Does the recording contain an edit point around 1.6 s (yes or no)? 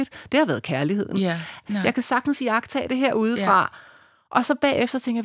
yes